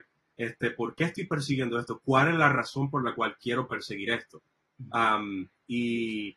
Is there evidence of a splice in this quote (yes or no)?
no